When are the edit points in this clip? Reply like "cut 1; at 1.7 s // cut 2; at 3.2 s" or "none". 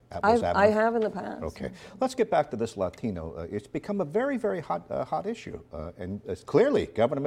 none